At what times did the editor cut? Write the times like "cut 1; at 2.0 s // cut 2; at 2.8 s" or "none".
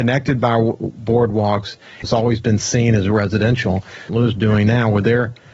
cut 1; at 2.0 s // cut 2; at 4.1 s